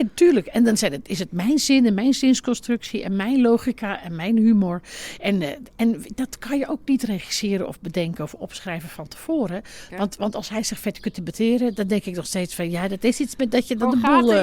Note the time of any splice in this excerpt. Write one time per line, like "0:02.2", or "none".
0:09.9